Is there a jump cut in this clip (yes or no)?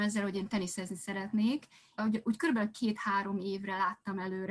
yes